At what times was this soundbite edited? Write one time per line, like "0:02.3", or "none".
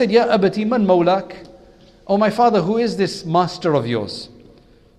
none